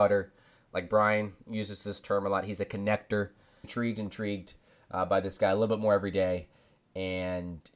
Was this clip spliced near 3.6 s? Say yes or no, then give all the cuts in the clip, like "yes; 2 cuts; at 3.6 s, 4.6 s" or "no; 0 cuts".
yes; 1 cut; at 3.6 s